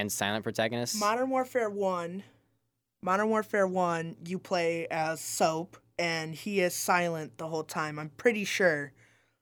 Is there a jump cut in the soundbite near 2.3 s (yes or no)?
no